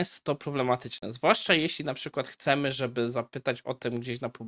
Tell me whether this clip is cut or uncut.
uncut